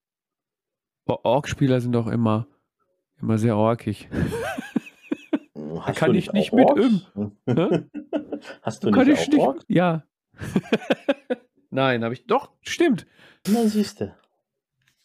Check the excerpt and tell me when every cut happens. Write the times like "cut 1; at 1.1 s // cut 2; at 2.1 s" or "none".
cut 1; at 9.6 s // cut 2; at 13.5 s